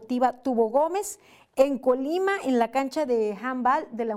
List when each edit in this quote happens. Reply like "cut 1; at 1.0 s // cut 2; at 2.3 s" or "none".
none